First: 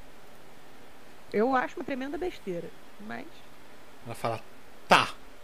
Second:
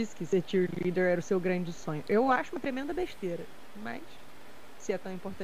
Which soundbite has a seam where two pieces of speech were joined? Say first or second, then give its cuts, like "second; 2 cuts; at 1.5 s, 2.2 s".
first; 2 cuts; at 1.3 s, 4.0 s